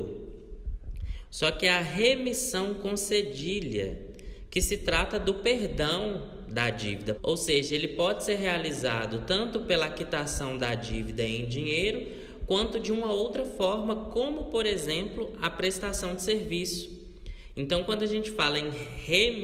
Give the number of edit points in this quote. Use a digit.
2